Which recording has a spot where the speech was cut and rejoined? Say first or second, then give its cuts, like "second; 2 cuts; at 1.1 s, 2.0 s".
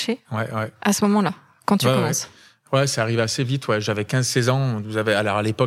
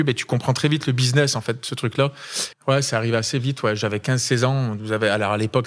second; 1 cut; at 2.5 s